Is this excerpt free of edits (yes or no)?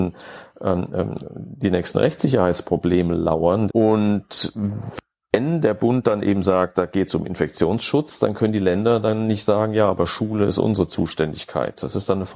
no